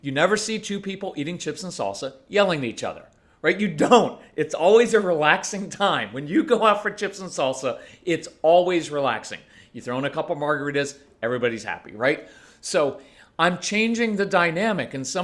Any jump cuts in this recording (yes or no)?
no